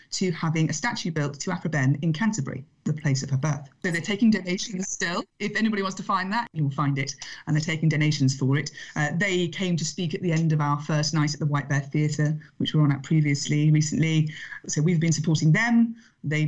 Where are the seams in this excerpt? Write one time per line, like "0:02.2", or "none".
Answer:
0:06.5